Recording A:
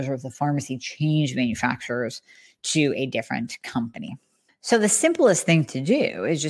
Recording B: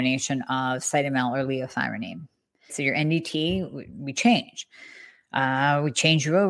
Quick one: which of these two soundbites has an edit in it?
B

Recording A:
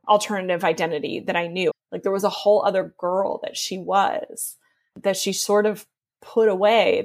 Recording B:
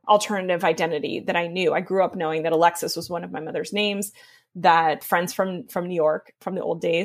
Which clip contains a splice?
A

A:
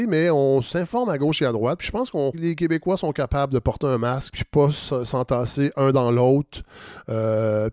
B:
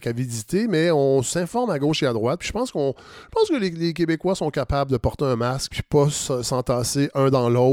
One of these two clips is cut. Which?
A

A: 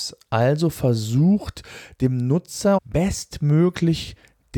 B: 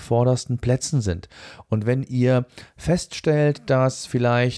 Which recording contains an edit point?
A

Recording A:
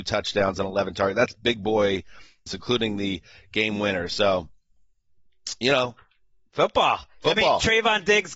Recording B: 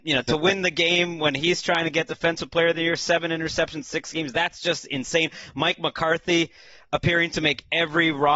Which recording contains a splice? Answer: A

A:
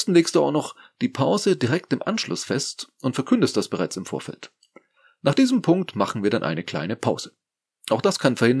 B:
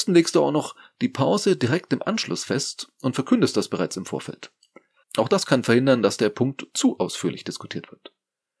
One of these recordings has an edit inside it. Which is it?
B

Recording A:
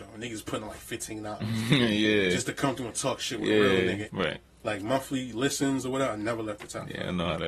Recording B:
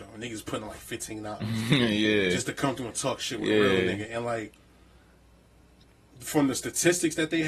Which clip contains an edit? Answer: A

